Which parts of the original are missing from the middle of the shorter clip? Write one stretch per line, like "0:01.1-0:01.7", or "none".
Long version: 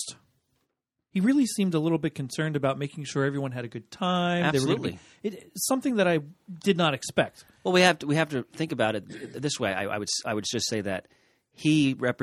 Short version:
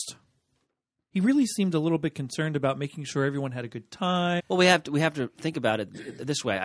0:04.4-0:07.5